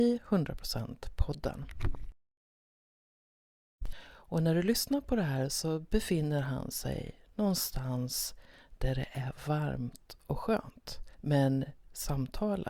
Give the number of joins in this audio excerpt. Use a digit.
2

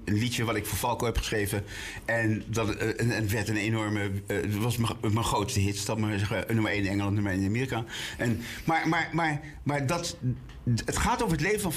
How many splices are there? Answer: 0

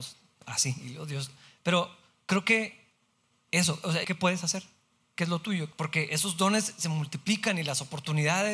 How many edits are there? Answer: 2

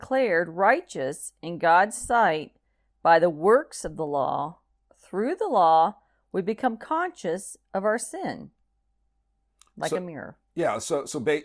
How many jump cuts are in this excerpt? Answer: 1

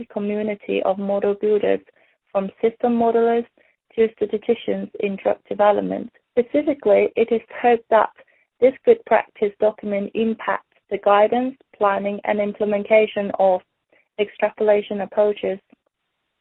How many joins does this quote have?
1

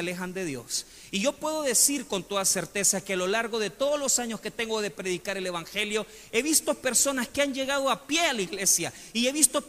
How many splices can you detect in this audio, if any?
0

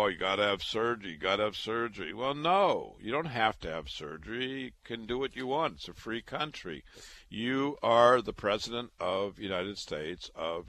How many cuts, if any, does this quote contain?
0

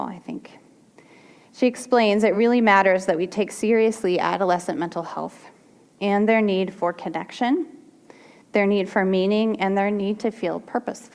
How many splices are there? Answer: 0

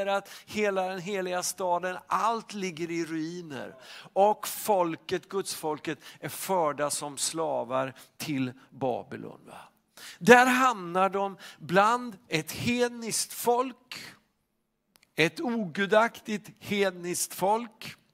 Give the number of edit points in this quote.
0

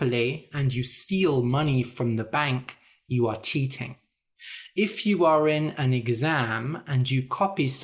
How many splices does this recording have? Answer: 0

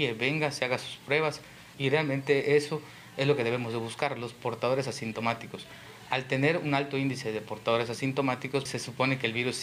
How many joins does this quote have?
2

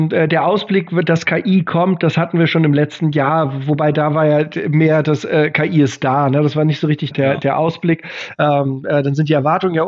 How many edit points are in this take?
2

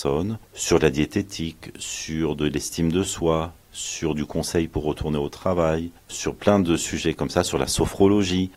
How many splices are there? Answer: 0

